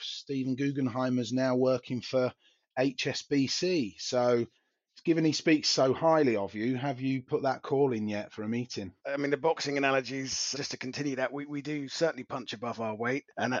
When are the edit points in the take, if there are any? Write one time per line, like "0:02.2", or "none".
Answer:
0:09.0
0:10.5